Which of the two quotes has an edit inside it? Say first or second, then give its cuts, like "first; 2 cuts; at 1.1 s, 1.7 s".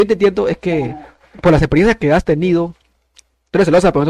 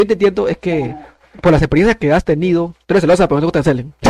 second; 1 cut; at 2.8 s